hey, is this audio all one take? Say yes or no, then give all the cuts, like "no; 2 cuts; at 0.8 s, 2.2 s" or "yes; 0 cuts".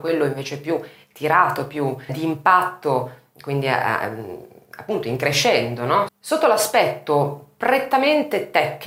no; 2 cuts; at 2.1 s, 6.1 s